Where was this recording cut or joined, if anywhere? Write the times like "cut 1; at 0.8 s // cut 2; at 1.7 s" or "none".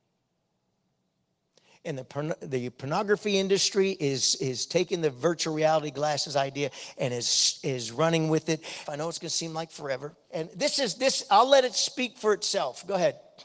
cut 1; at 8.9 s // cut 2; at 10.3 s